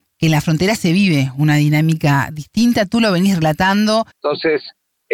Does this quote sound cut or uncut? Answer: cut